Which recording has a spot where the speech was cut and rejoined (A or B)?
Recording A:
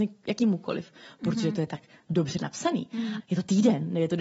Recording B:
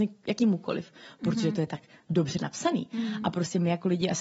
A